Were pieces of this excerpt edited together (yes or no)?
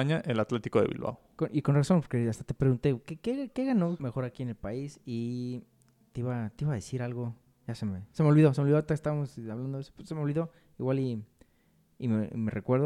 yes